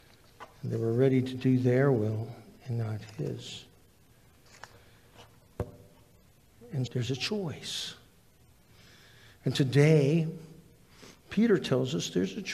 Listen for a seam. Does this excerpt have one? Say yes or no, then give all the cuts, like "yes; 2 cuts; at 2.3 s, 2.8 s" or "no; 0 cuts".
yes; 1 cut; at 6.9 s